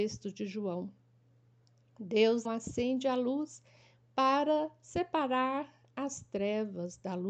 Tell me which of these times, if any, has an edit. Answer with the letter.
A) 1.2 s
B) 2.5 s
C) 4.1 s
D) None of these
B